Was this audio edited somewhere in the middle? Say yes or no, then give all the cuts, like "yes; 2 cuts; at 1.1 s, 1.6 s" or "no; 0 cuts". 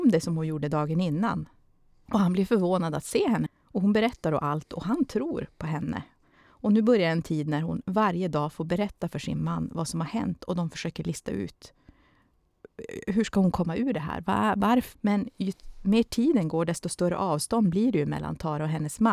yes; 3 cuts; at 2.1 s, 3.5 s, 14.9 s